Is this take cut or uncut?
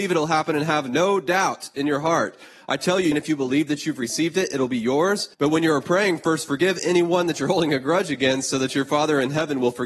cut